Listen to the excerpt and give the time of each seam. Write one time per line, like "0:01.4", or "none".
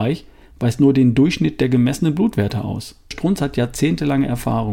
0:03.1